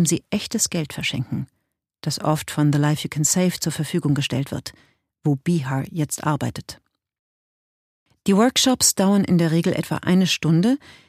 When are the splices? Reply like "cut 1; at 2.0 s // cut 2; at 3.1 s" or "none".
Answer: none